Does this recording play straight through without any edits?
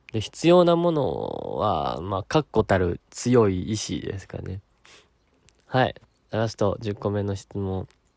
no; 1 cut; at 4.8 s

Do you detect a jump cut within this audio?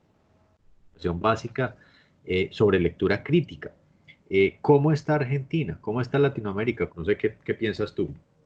yes; 1 cut; at 6.9 s

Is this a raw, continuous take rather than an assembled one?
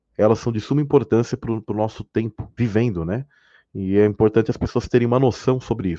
no; 1 cut; at 2.6 s

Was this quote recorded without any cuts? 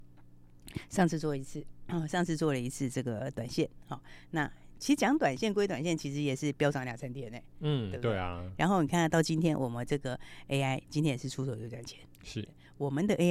yes; 0 cuts

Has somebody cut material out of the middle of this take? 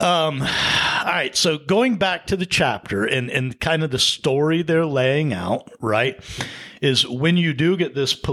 no; 0 cuts

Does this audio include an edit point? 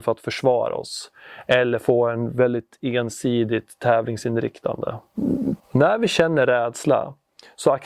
yes; 1 cut; at 5.6 s

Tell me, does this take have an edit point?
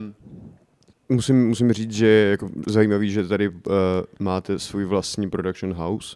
no; 0 cuts

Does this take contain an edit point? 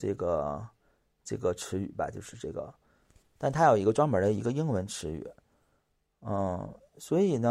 no; 0 cuts

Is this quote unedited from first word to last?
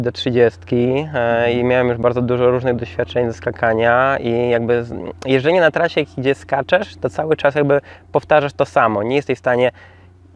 yes; 0 cuts

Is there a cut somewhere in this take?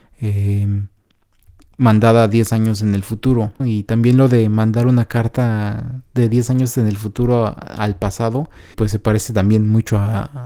yes; 2 cuts; at 3.6 s, 8.7 s

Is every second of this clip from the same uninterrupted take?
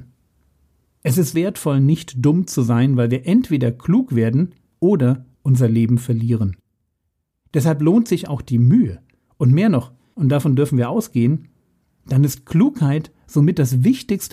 no; 2 cuts; at 1.3 s, 10.1 s

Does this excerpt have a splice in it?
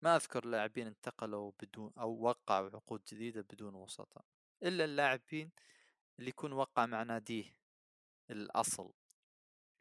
no; 0 cuts

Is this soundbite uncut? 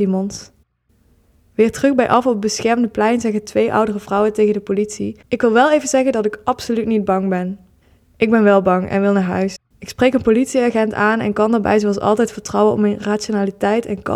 yes; 0 cuts

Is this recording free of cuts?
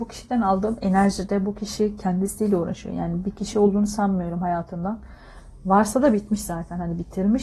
yes; 0 cuts

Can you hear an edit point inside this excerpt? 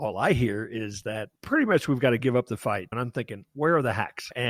yes; 1 cut; at 1.4 s

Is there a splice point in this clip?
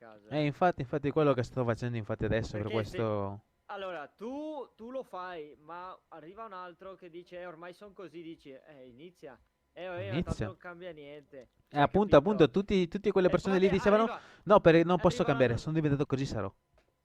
yes; 1 cut; at 16.0 s

